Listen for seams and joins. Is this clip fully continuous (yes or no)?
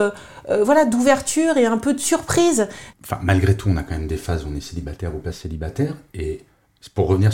no